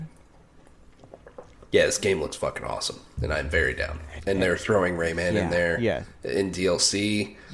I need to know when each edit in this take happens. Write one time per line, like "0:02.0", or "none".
none